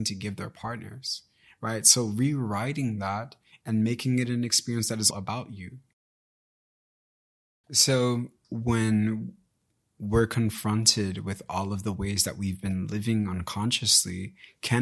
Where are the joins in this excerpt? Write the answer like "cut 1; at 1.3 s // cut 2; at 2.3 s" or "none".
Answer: cut 1; at 5.1 s // cut 2; at 8.4 s

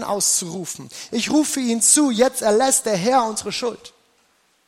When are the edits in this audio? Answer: cut 1; at 1.1 s

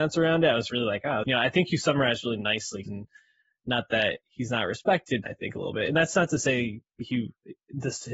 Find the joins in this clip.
cut 1; at 1.2 s // cut 2; at 2.8 s // cut 3; at 5.2 s

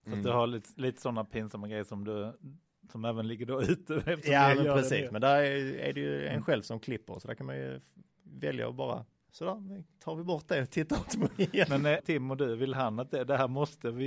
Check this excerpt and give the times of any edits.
cut 1; at 12.0 s

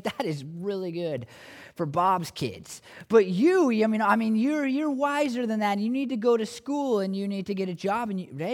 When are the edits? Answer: none

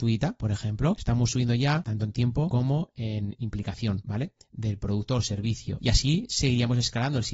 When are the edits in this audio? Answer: cut 1; at 0.9 s

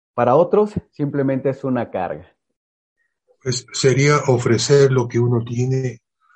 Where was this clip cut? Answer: cut 1; at 3.3 s

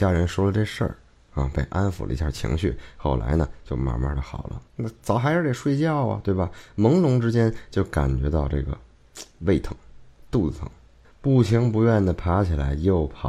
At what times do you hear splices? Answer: cut 1; at 4.7 s // cut 2; at 11.0 s

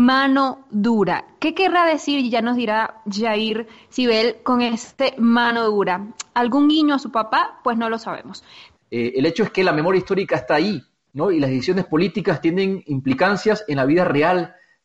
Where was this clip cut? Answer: cut 1; at 8.8 s

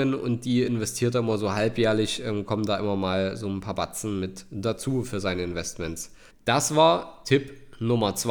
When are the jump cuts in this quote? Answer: cut 1; at 6.3 s

